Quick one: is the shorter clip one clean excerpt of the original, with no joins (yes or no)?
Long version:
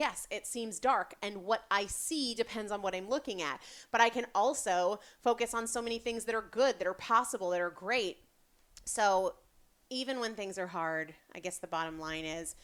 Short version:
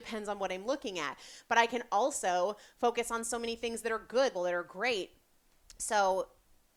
no